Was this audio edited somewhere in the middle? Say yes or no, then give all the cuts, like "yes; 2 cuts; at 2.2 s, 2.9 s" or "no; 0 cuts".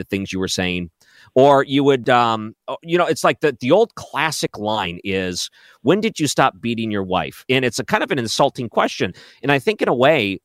yes; 1 cut; at 7.5 s